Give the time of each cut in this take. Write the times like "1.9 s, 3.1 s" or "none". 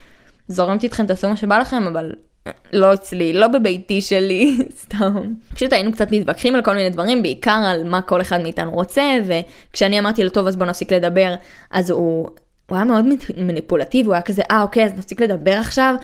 none